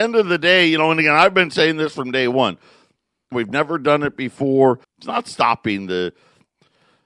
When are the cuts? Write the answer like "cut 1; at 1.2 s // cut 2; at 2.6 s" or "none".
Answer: cut 1; at 3.3 s // cut 2; at 4.8 s